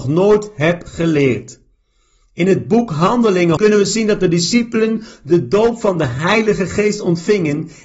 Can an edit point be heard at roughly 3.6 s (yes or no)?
yes